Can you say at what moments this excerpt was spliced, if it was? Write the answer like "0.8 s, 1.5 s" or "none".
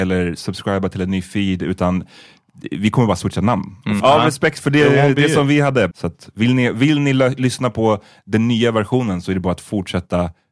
4.0 s, 5.9 s